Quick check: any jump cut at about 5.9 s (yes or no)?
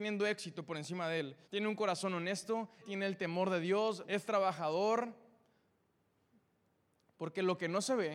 no